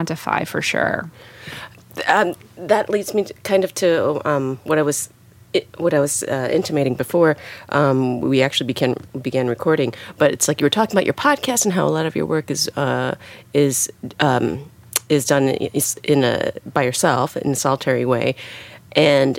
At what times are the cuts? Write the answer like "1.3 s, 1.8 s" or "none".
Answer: none

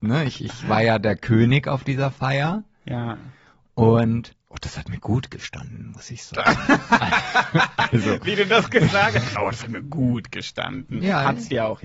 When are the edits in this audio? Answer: 9.4 s

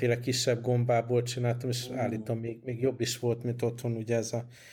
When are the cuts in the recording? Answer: none

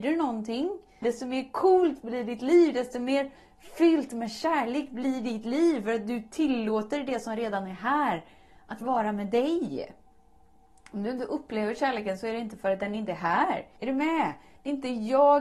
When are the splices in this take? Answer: 1.0 s, 13.8 s

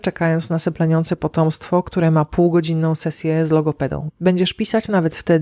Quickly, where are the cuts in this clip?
4.1 s

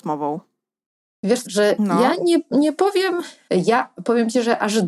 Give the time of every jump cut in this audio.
1.5 s, 3.5 s

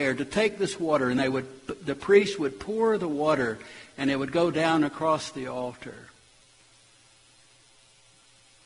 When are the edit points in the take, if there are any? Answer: none

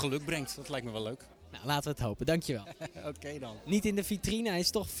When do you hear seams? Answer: 2.7 s

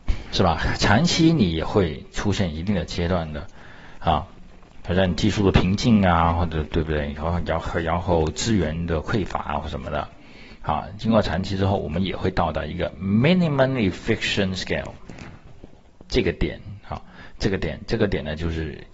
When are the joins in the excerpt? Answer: none

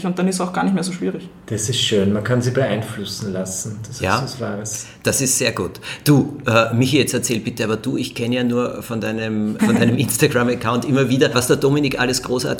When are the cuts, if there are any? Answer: 9.6 s, 11.3 s

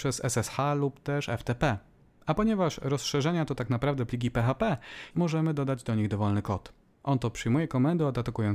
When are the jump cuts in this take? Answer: 5.1 s, 6.9 s

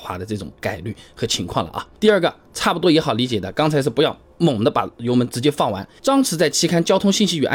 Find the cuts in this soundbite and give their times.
2.0 s, 6.0 s

